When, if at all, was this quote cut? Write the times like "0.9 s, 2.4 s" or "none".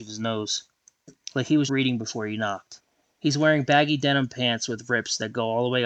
1.7 s